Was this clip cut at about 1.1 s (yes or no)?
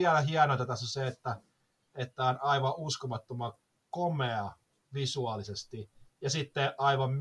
no